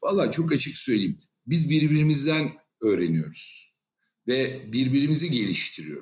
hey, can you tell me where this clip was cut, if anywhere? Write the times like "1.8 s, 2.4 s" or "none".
none